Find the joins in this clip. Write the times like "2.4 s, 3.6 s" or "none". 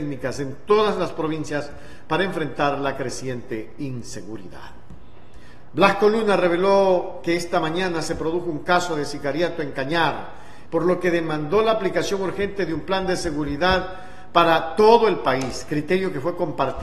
5.7 s, 10.7 s